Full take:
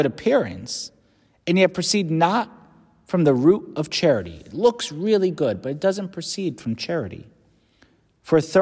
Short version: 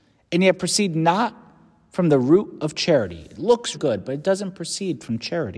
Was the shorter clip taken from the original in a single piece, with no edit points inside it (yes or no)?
no